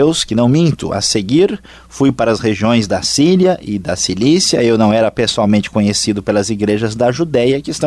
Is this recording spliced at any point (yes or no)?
no